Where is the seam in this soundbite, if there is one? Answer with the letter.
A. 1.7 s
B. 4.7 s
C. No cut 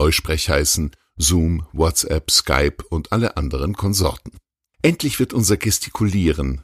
B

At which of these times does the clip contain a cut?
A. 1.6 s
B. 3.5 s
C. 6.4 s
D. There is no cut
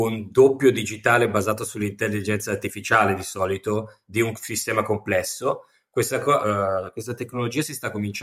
C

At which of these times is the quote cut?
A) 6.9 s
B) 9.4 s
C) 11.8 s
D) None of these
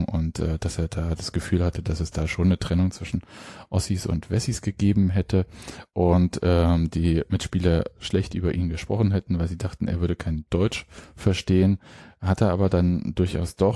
D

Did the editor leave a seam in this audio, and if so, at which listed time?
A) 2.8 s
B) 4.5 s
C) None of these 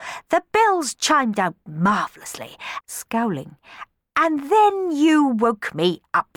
A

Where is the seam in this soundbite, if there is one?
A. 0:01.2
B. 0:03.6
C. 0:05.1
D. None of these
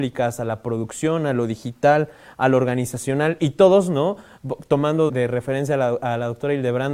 C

